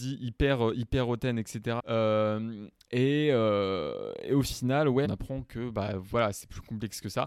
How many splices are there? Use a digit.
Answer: 2